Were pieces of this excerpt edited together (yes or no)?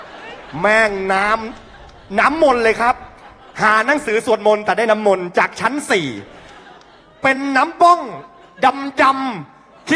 no